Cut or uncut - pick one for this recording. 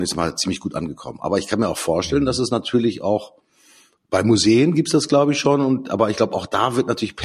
uncut